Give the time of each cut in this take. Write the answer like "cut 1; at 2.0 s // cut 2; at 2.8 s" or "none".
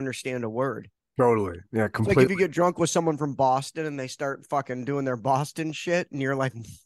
none